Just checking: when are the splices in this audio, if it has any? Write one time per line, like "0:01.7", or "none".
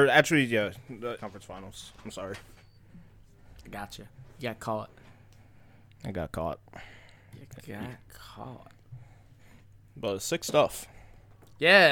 0:01.2